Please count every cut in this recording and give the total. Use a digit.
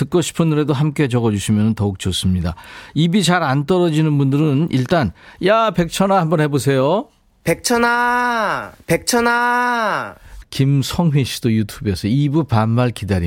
2